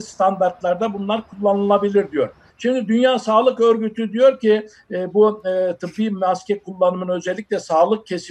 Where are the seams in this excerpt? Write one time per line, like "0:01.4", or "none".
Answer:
0:02.5